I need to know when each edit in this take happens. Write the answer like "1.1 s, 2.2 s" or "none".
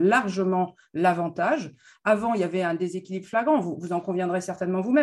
none